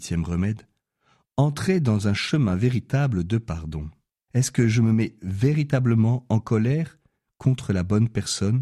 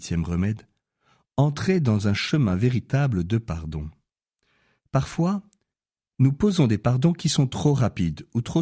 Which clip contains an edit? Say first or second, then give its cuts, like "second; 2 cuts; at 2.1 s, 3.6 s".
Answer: first; 1 cut; at 4.3 s